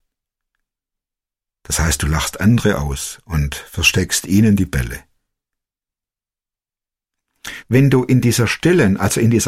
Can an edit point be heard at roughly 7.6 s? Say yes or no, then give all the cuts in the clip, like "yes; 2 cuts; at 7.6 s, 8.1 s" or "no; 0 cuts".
yes; 1 cut; at 7.6 s